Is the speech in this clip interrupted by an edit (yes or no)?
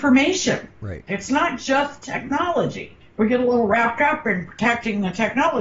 yes